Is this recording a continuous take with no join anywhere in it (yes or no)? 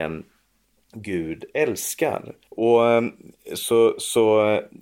no